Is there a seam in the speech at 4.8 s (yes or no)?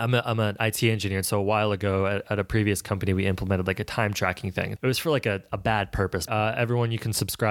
yes